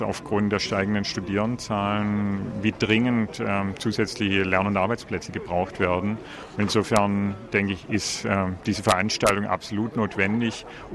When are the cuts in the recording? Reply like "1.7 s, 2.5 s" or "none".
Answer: none

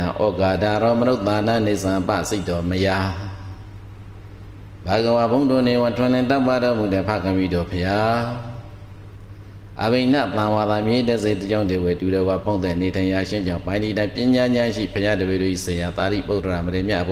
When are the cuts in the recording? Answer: none

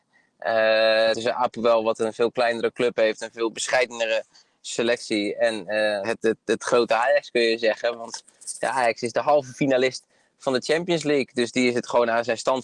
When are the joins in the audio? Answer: 1.1 s, 6.0 s

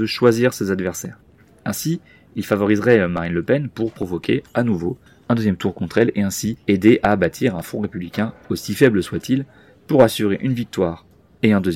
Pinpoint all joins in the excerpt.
none

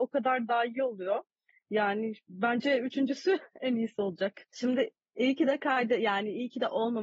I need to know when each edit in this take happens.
none

